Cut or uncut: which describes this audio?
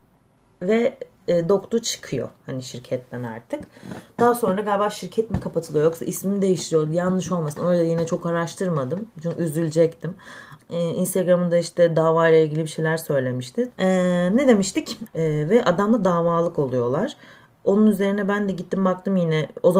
cut